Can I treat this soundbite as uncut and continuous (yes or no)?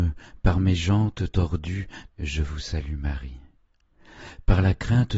no